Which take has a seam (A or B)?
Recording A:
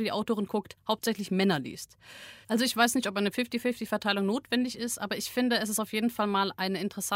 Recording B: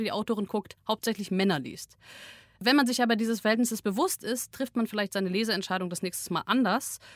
A